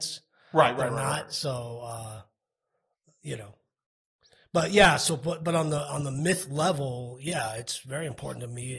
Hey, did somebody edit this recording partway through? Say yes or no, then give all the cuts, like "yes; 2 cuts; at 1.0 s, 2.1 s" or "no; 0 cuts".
no; 0 cuts